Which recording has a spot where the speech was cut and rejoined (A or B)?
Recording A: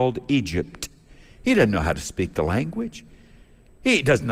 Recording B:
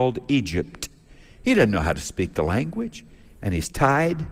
B